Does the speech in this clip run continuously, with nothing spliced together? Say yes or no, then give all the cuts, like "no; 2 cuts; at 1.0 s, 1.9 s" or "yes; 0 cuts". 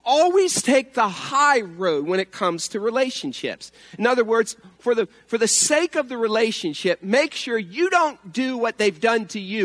yes; 0 cuts